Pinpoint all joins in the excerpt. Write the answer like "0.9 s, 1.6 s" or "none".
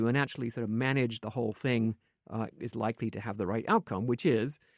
2.5 s

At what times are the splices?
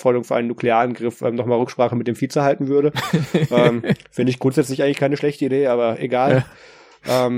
none

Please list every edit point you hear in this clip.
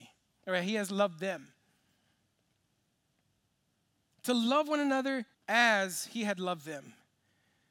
5.3 s

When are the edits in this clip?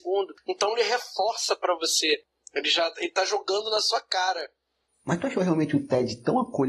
none

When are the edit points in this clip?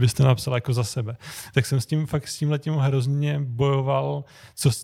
none

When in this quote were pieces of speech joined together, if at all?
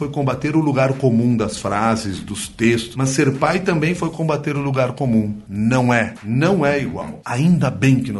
5.4 s, 7.2 s

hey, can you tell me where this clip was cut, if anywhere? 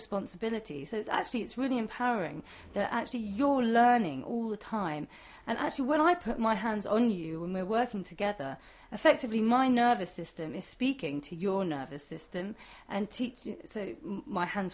5.4 s

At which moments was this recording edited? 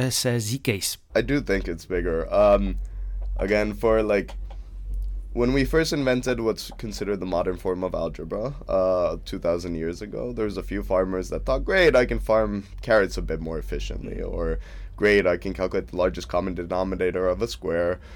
1.1 s

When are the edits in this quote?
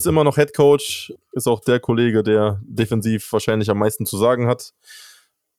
1.2 s

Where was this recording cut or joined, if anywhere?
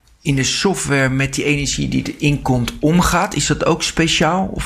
none

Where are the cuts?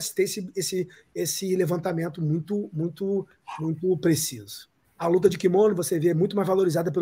4.8 s

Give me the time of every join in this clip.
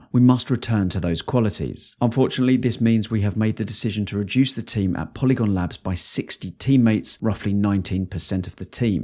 none

